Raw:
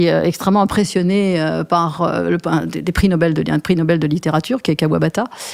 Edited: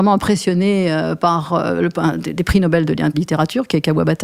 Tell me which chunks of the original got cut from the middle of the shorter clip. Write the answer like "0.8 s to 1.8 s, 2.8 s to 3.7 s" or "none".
3.6 s to 4.1 s